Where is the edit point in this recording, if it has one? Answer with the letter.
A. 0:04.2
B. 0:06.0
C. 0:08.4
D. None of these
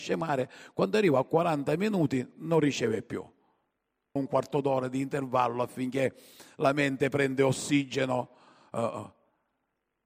A